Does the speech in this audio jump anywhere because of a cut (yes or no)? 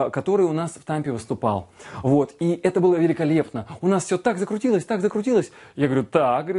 no